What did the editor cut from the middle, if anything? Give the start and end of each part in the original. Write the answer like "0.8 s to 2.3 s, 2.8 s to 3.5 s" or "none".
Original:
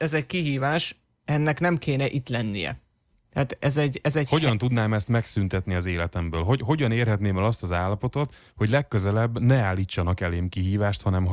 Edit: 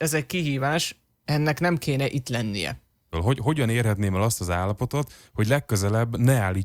3.1 s to 6.3 s

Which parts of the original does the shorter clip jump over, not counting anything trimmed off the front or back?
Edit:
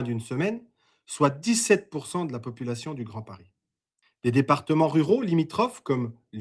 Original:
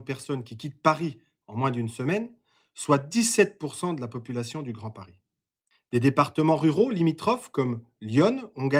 none

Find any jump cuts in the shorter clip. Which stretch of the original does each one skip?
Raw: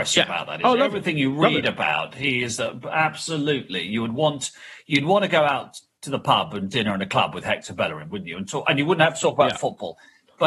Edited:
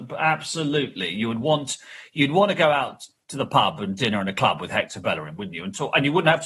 none

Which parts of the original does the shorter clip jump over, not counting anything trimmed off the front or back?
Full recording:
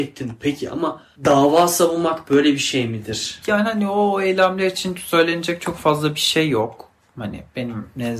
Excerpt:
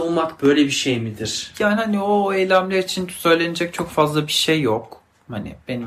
none

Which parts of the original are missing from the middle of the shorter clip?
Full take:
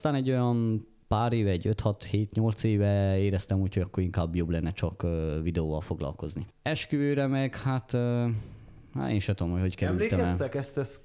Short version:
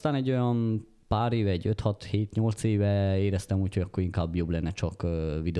none

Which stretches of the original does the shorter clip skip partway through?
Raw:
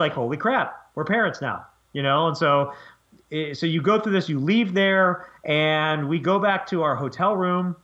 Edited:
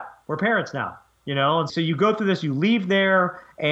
2.4 s to 3.6 s

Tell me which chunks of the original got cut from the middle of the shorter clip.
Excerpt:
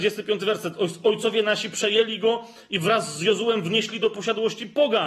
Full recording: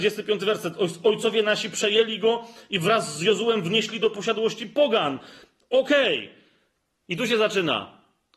none

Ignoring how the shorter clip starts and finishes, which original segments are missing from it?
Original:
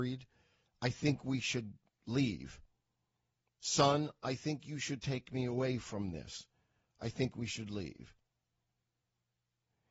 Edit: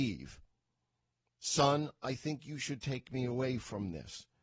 none

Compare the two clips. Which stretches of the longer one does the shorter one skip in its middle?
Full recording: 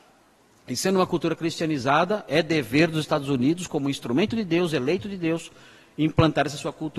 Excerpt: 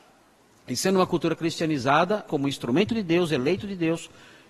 2.3 s to 3.7 s

